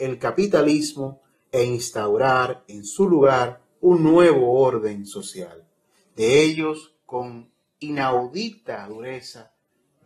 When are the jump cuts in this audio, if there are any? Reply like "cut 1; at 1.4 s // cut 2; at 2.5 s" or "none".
none